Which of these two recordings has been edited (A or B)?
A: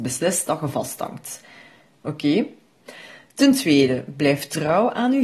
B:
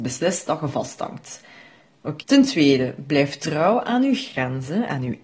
B